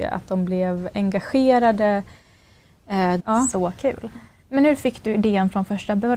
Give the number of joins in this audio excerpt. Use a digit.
2